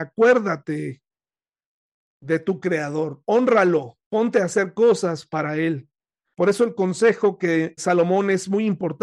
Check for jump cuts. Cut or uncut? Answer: cut